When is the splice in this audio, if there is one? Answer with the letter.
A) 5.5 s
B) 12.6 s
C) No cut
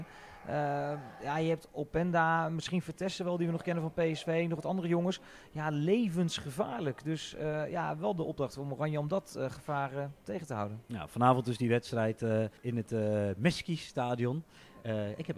B